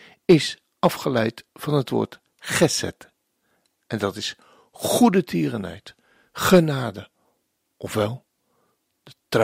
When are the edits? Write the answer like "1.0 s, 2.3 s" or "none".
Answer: none